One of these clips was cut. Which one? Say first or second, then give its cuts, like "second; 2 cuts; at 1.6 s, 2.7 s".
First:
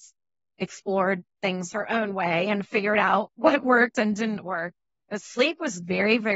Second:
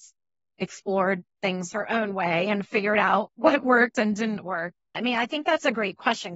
second; 1 cut; at 4.9 s